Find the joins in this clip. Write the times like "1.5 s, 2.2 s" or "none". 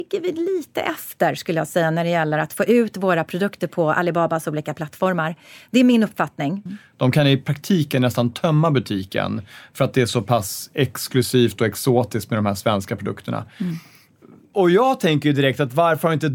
6.7 s